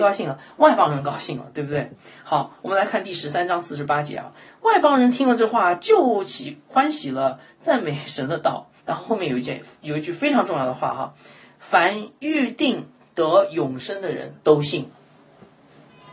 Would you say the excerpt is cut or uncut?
cut